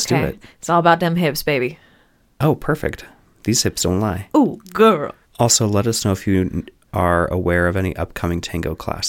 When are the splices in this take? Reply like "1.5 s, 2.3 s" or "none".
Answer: 5.2 s